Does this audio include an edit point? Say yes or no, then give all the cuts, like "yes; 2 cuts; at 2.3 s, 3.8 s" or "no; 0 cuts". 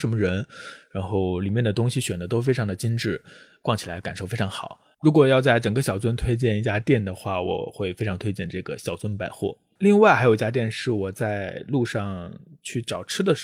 no; 0 cuts